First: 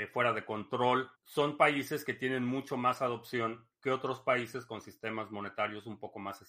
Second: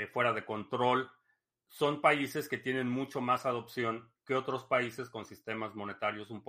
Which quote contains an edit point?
first; 1 cut; at 1.1 s

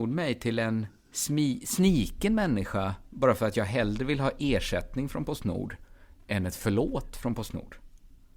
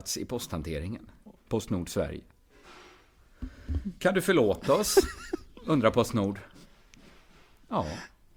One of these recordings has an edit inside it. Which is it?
second; 1 cut; at 1.4 s

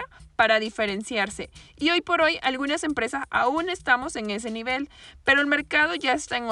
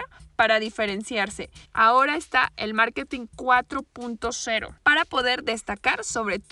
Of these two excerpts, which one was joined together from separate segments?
second; 2 cuts; at 1.6 s, 4.8 s

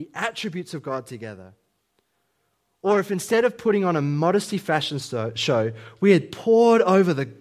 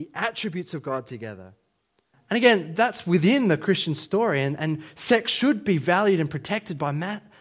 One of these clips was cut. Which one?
second; 1 cut; at 2.1 s

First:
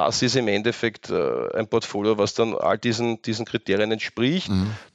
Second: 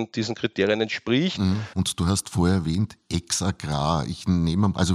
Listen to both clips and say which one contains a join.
second; 1 cut; at 1.7 s

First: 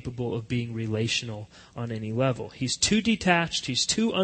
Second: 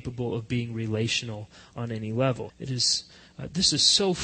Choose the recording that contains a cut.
second; 1 cut; at 2.5 s

